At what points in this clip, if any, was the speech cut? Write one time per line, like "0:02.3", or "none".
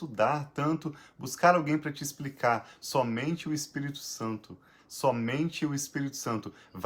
0:04.8